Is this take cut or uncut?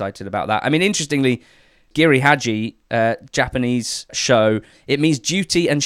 uncut